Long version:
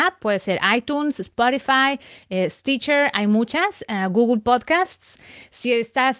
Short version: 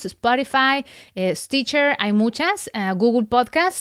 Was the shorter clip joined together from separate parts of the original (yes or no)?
no